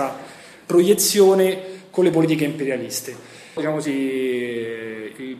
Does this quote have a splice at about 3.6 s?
yes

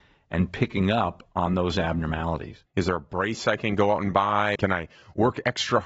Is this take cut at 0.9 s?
no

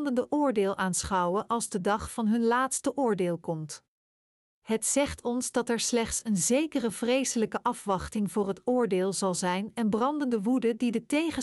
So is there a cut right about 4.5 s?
yes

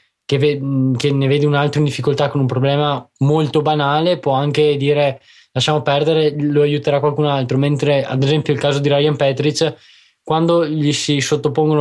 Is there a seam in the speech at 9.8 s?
no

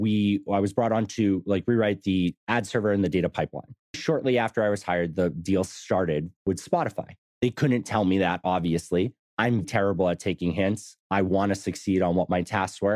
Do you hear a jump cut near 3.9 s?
yes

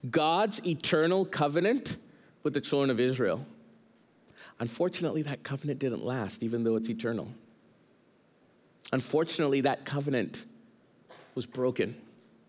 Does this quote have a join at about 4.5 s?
no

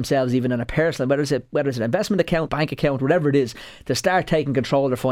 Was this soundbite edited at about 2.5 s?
yes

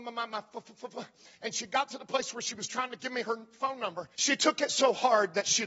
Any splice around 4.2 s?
yes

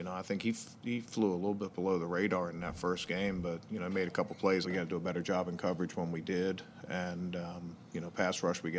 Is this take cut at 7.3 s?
no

